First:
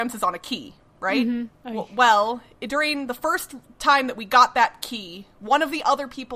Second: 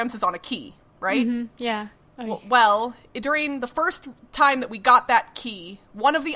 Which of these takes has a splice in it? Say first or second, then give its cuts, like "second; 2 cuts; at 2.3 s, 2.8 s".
first; 1 cut; at 1.5 s